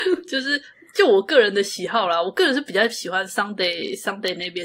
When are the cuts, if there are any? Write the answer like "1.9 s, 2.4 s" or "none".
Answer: none